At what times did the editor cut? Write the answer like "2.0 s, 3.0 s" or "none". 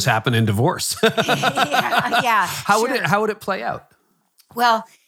none